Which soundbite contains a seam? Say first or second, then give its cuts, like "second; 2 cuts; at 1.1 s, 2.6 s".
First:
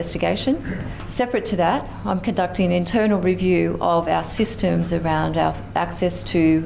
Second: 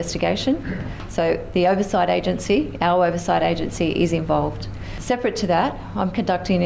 first; 1 cut; at 1.1 s